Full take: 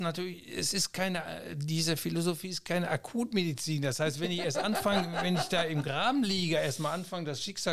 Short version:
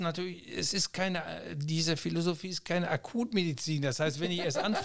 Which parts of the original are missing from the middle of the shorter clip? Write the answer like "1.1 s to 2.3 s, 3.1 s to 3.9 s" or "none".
none